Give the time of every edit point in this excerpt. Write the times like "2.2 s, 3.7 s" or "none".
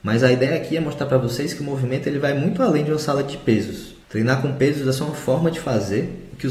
4.0 s

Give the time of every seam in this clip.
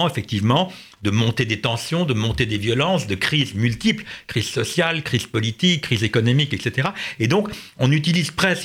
none

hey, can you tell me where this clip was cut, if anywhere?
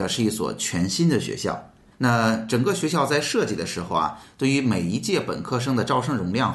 1.9 s

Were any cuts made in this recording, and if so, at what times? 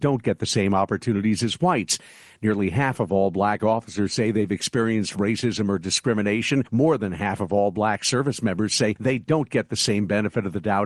none

